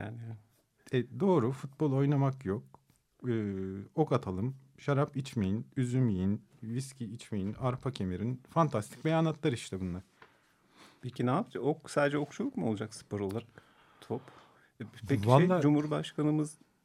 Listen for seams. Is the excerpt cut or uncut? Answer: uncut